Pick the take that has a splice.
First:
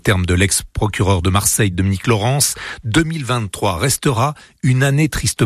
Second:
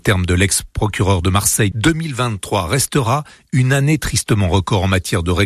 second; 1 cut; at 1.7 s

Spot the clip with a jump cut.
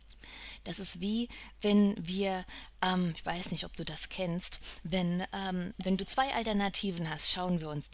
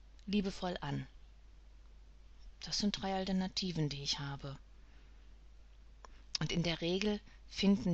second; 1 cut; at 6.4 s

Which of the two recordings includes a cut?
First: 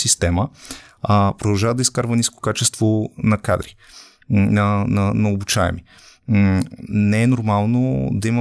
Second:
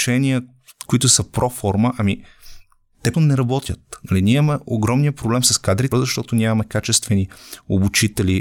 second; 2 cuts; at 3.1 s, 5.9 s

